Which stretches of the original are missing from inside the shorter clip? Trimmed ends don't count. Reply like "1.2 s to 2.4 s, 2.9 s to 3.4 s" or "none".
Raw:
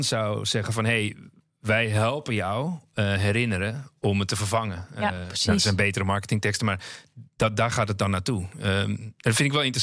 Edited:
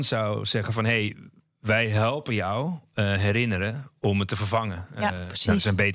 none